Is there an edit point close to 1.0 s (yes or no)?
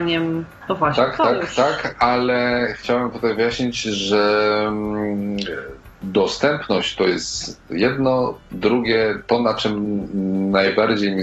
no